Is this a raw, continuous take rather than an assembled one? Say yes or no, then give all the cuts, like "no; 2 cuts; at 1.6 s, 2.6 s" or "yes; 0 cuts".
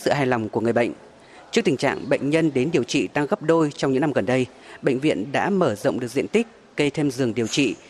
yes; 0 cuts